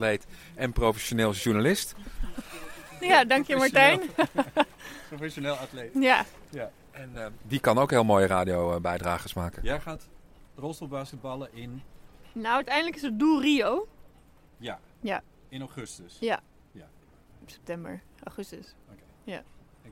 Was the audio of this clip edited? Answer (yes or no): no